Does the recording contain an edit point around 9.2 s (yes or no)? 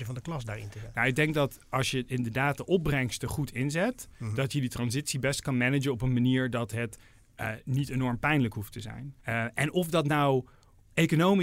yes